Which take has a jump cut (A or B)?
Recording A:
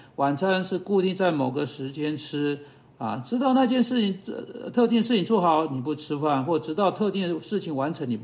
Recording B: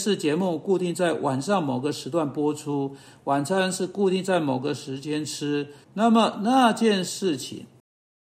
B